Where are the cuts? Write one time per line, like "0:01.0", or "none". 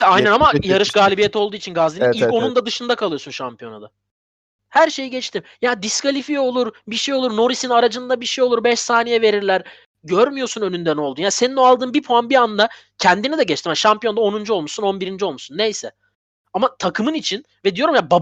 0:04.6